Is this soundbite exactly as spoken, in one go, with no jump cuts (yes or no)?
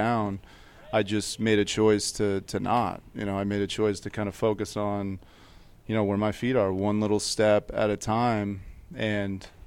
yes